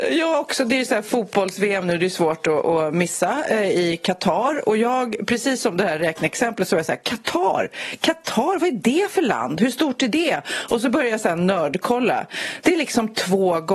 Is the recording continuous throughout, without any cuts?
yes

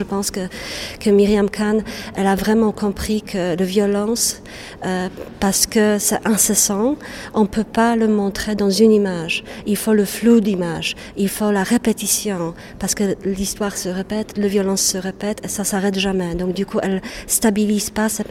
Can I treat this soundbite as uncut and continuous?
yes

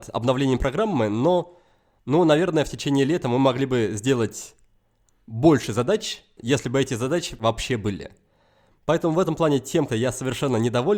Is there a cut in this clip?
yes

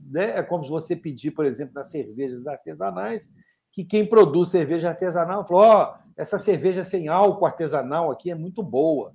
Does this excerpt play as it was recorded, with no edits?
yes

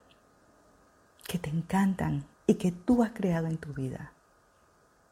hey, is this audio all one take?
no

